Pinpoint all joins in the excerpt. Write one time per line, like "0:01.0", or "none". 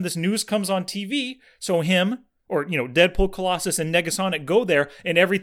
none